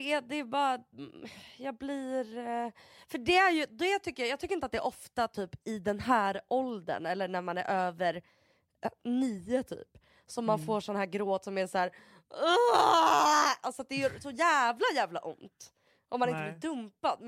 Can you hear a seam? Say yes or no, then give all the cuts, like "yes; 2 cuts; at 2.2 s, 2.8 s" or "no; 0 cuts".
no; 0 cuts